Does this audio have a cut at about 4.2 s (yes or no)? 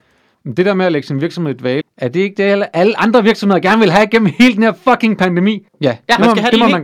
no